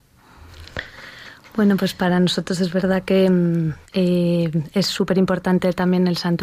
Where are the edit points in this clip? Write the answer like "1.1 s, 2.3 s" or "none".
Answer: 3.9 s